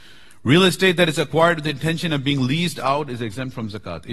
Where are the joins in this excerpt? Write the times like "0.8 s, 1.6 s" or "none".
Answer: none